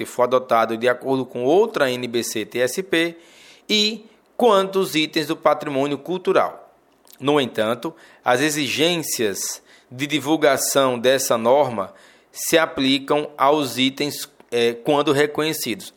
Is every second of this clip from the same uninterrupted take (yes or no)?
yes